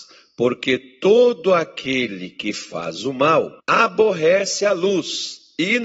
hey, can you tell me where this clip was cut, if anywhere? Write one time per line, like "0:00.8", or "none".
0:03.6